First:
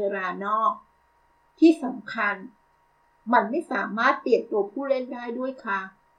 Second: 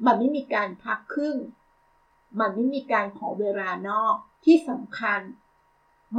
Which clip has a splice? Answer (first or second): second